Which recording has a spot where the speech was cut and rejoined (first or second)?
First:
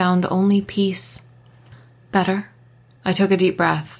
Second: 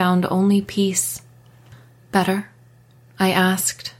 first